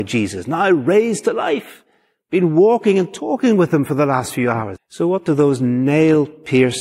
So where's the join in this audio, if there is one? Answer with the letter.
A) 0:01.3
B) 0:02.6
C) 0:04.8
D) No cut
C